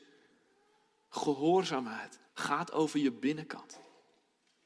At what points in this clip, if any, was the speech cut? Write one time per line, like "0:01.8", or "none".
0:02.3